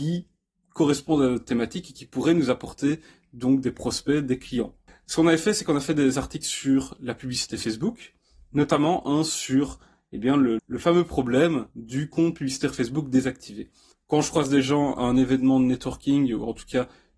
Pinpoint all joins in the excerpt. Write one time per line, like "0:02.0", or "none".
0:10.6
0:13.9